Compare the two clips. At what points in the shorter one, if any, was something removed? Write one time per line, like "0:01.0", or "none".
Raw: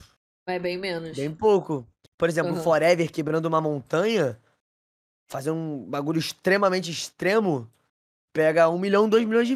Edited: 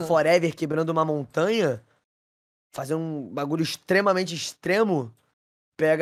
none